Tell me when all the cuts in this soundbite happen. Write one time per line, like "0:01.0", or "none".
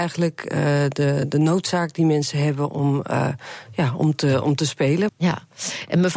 0:05.1